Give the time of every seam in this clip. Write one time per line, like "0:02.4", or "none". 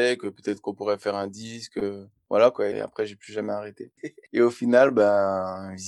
0:02.7
0:04.0

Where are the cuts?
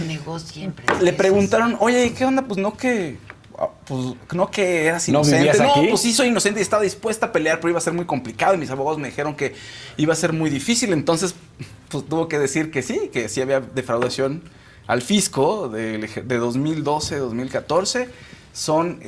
none

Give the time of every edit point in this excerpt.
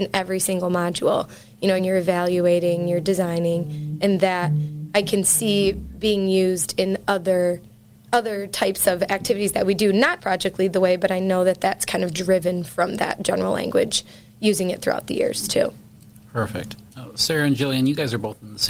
0:01.8
0:10.2
0:16.9

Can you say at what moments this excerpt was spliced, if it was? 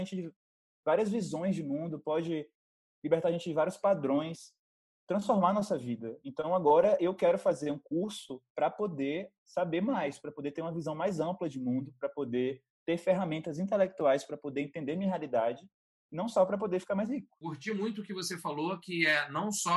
none

